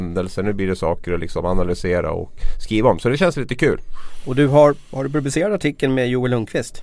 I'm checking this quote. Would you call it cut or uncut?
uncut